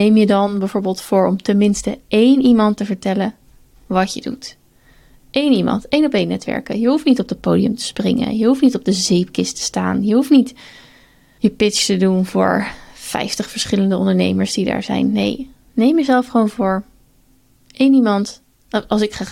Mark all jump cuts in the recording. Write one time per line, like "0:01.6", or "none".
none

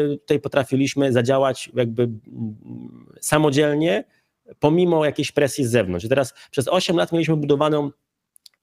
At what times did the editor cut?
none

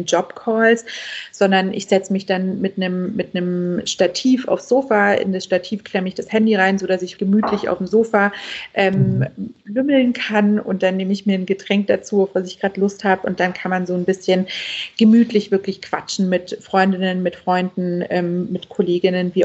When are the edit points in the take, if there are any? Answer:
0:07.2

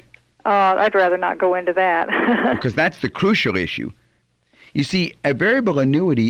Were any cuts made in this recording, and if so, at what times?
none

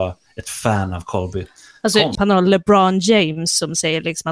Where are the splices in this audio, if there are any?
0:02.2

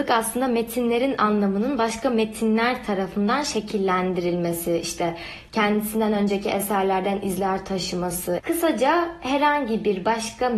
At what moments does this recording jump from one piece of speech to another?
0:08.4

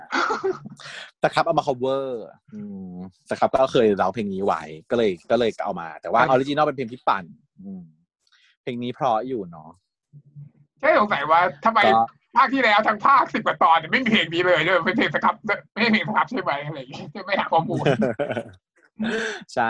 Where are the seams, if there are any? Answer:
0:06.3
0:15.7

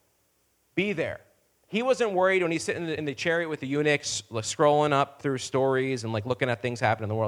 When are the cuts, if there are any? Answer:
none

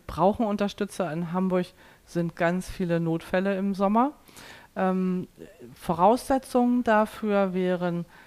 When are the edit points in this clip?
0:02.4

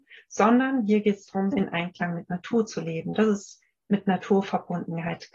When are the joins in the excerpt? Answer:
0:01.5

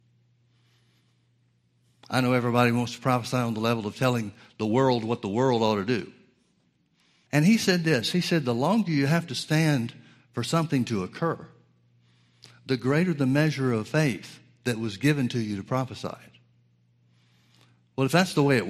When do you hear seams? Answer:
0:07.3

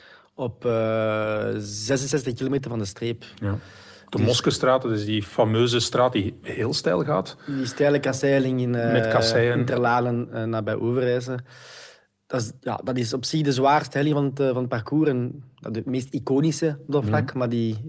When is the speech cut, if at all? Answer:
0:12.6

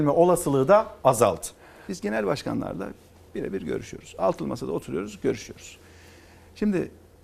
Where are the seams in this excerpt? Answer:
0:01.9

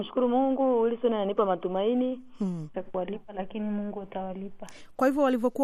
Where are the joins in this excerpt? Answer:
0:02.7

